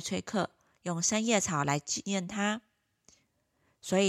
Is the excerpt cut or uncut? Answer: uncut